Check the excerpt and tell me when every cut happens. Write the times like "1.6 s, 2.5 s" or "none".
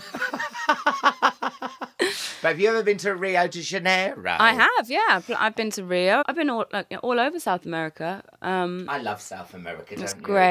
6.2 s